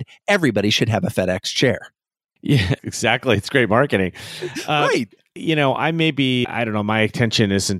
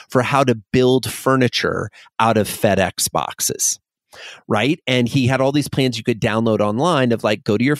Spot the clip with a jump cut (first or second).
first